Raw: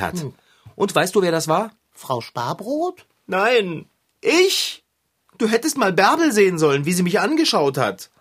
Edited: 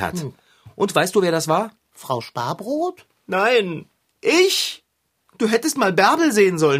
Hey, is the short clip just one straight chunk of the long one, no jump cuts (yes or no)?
yes